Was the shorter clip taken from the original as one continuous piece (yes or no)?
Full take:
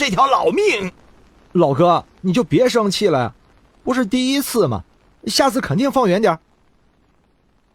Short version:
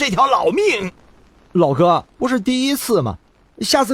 no